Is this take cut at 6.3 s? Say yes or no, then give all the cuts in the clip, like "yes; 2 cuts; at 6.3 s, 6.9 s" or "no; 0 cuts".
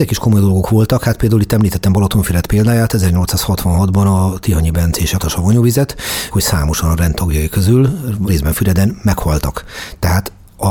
yes; 3 cuts; at 5.2 s, 6.3 s, 8.3 s